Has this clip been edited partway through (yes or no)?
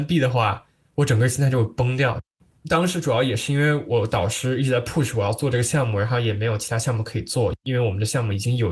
no